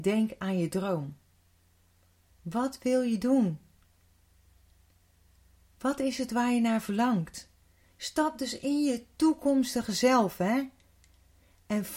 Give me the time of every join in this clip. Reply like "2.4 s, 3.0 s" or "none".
2.3 s